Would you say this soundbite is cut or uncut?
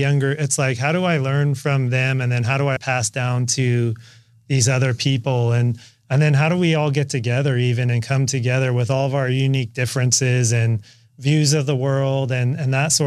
cut